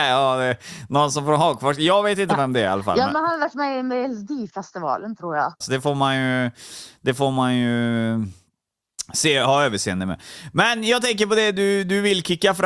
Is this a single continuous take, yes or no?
no